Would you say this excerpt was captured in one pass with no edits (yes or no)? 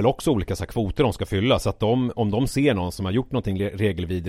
yes